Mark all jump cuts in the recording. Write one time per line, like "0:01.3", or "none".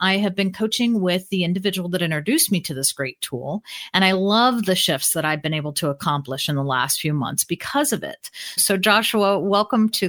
0:08.6